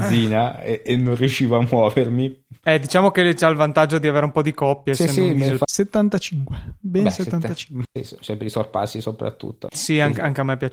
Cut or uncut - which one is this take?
cut